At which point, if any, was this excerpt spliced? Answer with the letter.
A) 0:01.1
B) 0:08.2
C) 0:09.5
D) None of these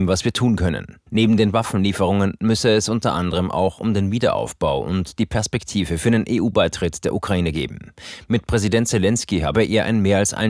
A